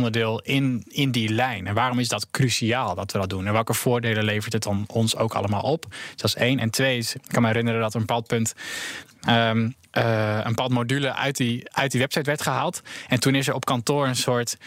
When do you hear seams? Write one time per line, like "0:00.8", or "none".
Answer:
none